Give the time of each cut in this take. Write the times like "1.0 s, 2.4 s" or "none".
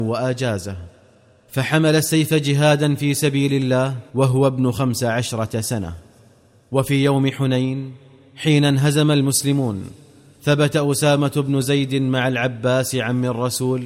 4.1 s